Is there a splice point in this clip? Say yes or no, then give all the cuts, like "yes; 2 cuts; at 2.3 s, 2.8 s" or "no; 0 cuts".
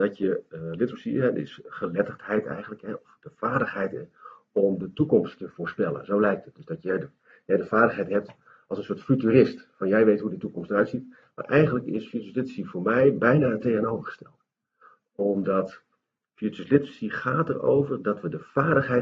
no; 0 cuts